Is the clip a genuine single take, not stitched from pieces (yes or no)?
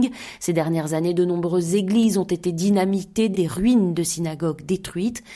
no